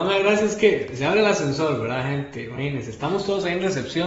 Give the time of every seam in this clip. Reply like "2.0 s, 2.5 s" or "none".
none